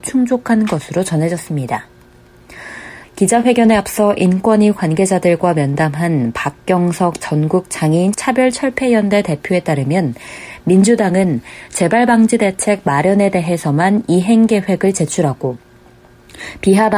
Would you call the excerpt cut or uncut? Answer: cut